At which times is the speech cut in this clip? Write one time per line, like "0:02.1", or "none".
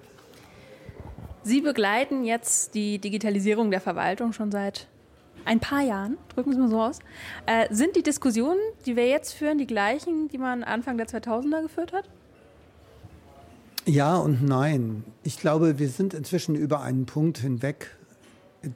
none